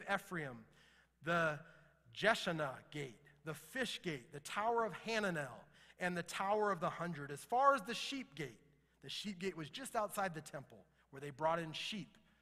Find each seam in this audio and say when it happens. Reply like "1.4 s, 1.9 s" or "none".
none